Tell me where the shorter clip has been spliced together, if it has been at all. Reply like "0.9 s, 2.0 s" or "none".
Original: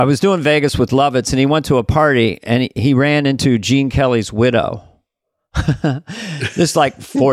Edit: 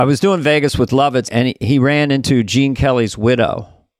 1.2 s